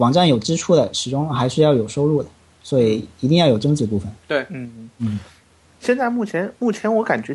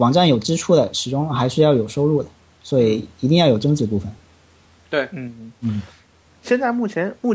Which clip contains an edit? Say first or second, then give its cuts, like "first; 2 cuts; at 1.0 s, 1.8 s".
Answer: first; 1 cut; at 4.2 s